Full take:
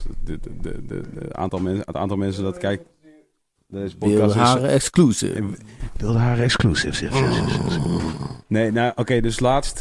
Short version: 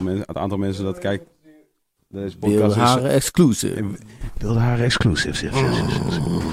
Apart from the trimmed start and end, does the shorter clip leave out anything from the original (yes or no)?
no